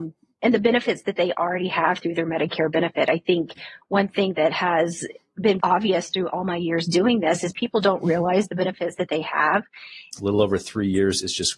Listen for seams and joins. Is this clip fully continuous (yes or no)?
no